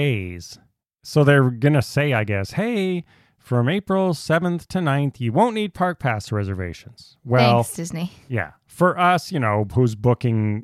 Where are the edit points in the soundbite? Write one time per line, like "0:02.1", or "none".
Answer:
none